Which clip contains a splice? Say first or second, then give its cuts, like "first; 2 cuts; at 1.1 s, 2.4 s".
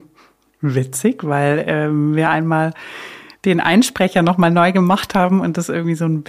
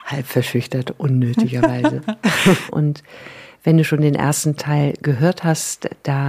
second; 1 cut; at 2.7 s